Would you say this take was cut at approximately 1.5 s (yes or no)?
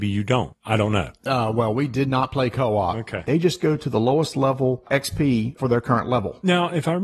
no